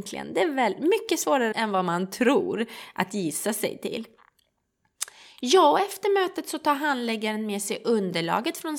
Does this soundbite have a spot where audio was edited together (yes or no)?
yes